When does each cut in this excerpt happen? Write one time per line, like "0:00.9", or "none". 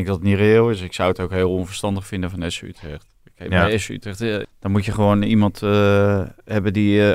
0:04.4